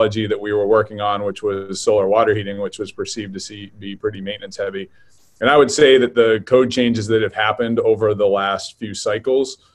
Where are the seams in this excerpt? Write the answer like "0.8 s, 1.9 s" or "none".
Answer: none